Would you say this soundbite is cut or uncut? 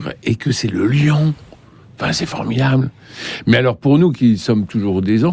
uncut